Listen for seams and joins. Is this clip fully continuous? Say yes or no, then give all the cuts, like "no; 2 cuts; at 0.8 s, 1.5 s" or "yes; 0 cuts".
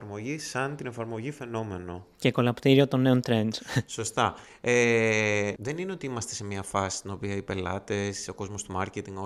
no; 1 cut; at 5.6 s